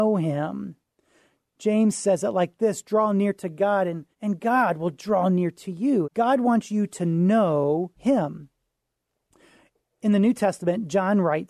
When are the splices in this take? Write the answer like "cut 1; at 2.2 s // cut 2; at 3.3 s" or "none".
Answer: cut 1; at 4.1 s // cut 2; at 6.0 s // cut 3; at 8.0 s